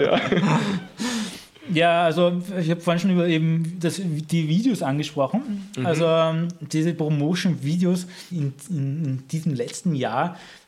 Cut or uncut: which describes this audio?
cut